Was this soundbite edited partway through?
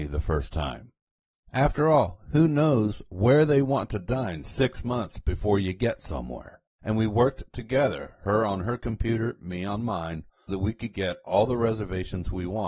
yes; 2 cuts; at 6.7 s, 10.5 s

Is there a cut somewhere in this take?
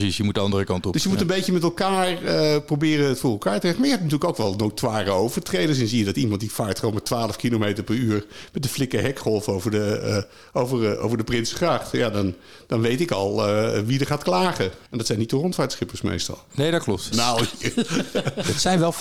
yes; 1 cut; at 17.1 s

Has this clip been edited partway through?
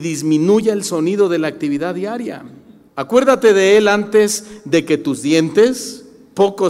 yes; 1 cut; at 2.9 s

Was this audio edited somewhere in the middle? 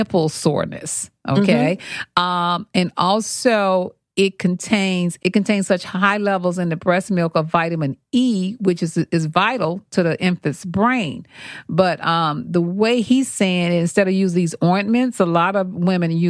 yes; 1 cut; at 5.2 s

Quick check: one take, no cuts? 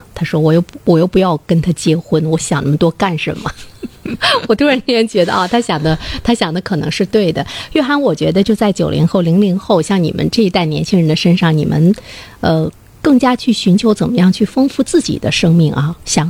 yes; 0 cuts

